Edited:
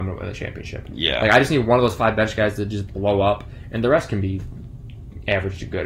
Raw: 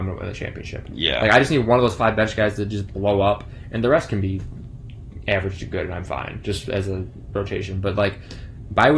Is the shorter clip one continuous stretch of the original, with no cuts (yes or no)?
yes